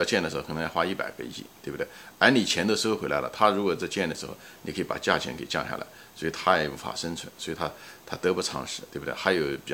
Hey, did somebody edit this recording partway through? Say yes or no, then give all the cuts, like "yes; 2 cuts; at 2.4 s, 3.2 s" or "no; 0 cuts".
no; 0 cuts